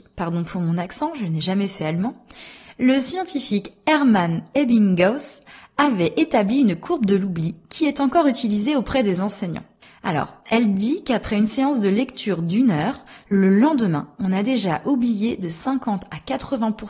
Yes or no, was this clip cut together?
no